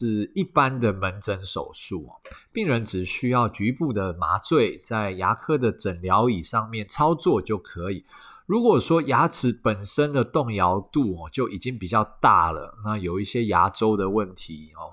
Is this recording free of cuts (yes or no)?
yes